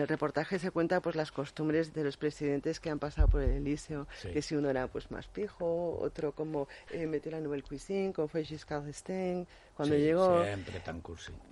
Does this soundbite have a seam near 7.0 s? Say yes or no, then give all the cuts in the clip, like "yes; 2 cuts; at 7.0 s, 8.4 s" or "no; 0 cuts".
no; 1 cut; at 1.9 s